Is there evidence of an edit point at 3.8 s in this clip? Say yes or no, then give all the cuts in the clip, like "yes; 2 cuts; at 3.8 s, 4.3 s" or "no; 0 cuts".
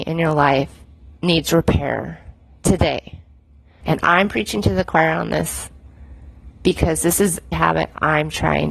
yes; 2 cuts; at 3.8 s, 7.5 s